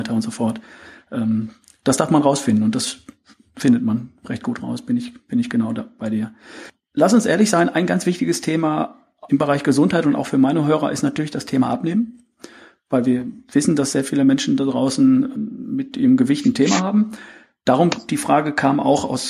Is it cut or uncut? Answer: cut